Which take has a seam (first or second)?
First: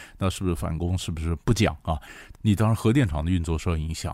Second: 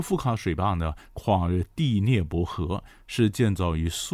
first